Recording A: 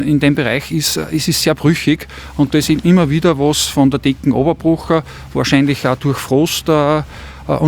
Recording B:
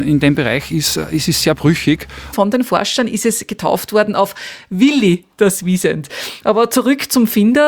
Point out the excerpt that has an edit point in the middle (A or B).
B